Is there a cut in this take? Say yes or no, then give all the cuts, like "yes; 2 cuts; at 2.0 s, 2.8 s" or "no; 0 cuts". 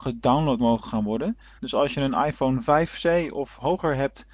yes; 1 cut; at 1.6 s